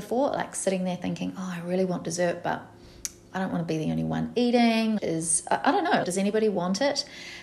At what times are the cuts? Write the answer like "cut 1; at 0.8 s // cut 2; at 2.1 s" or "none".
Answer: cut 1; at 5.0 s // cut 2; at 6.0 s